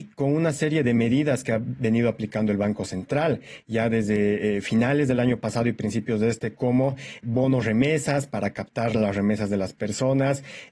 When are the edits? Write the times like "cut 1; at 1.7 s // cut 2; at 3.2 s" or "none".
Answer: none